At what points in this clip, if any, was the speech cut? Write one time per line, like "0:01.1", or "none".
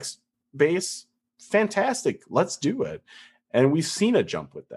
none